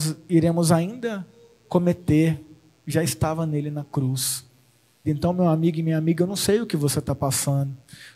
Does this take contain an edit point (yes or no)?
yes